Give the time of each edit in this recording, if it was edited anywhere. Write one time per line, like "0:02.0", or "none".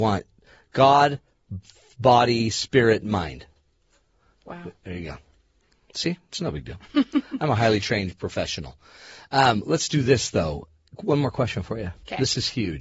none